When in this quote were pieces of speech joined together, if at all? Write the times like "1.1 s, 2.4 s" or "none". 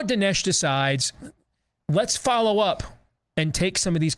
none